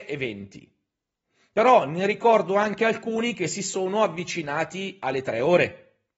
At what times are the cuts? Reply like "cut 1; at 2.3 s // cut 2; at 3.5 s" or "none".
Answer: none